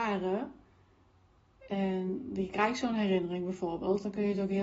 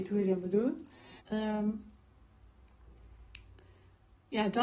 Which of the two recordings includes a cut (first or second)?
second